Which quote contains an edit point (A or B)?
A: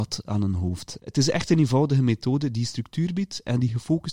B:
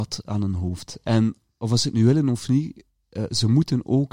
A